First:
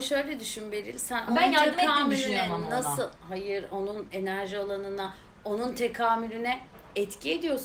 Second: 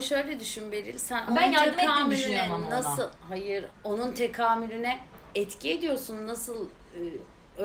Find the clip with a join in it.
second; 1 cut; at 3.7 s

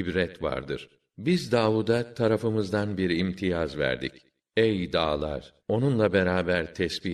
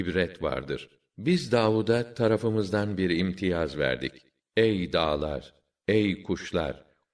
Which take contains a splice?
first; 1 cut; at 5.6 s

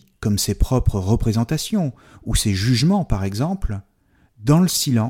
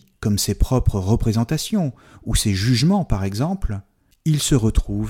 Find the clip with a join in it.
second; 1 cut; at 4.1 s

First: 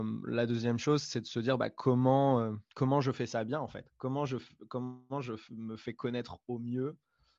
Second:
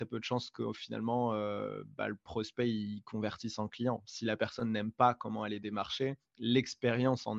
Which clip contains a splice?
first; 1 cut; at 2.7 s

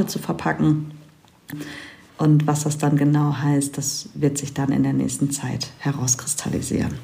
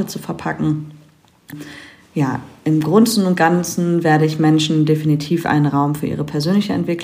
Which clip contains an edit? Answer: first; 1 cut; at 2.1 s

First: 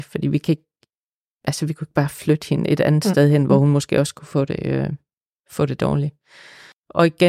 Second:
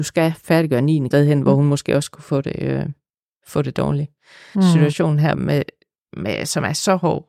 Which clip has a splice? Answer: second; 2 cuts; at 1.1 s, 4.5 s

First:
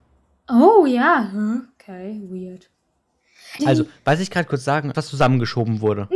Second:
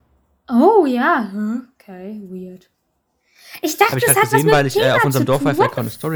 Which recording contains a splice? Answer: first; 2 cuts; at 3.6 s, 4.9 s

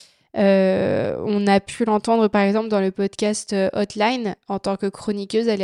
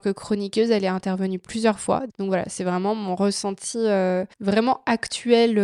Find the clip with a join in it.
second; 2 cuts; at 2.1 s, 4.3 s

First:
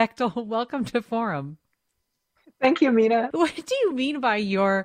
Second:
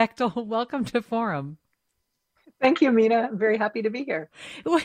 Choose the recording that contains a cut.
first; 1 cut; at 3.3 s

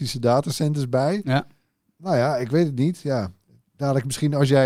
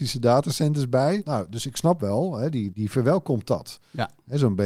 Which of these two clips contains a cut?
second; 2 cuts; at 1.2 s, 2.7 s

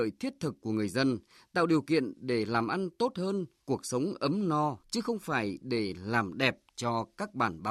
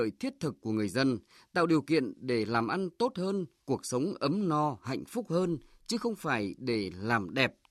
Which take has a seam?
first; 1 cut; at 4.8 s

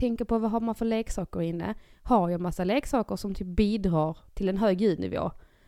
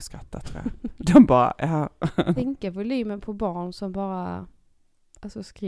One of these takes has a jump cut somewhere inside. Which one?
second; 1 cut; at 2.4 s

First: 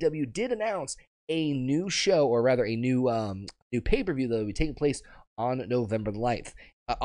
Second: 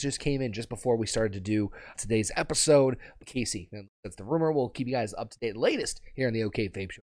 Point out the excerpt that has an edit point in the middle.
second; 2 cuts; at 1.9 s, 3.2 s

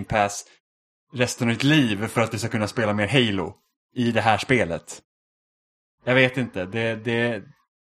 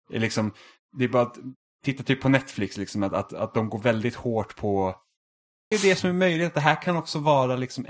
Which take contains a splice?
second; 1 cut; at 5.7 s

